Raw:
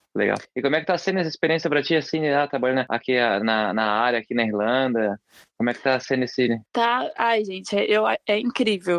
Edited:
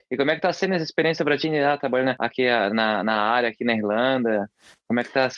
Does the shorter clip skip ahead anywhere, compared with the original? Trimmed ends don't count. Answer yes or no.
yes